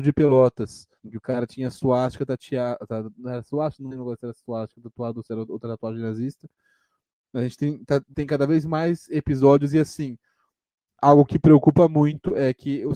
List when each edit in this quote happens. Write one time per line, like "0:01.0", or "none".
0:01.0

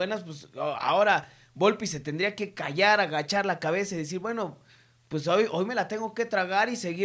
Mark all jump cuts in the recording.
none

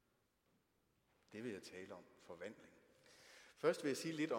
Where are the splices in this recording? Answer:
none

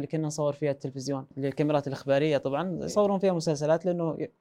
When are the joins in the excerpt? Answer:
0:01.3

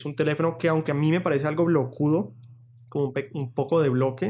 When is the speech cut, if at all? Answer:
none

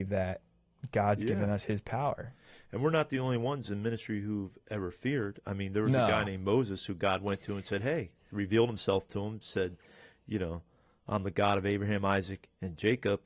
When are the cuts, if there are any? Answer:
0:08.3

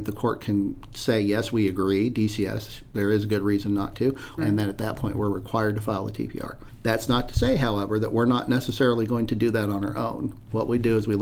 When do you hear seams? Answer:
0:04.4

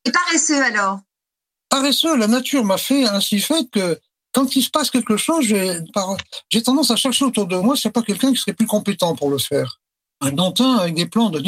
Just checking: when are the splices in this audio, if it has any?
0:05.9
0:10.0

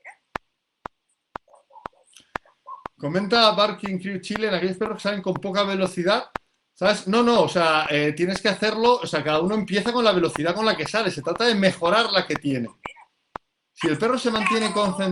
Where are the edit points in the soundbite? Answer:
none

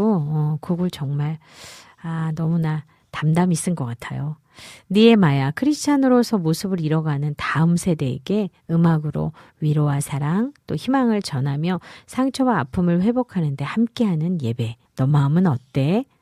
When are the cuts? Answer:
0:14.9

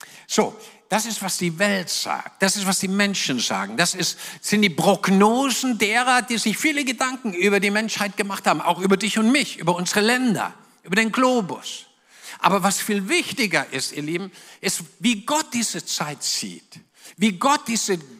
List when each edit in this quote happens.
none

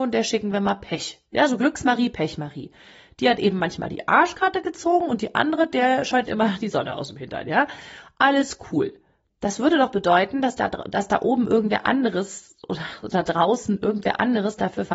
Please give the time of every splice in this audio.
none

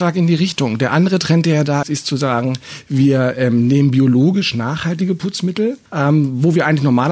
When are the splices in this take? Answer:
0:01.8
0:05.9

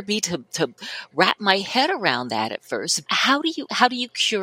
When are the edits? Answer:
0:03.1

